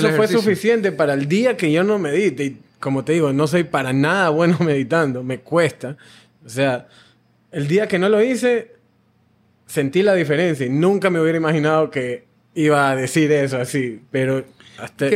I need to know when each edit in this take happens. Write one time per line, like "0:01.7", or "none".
none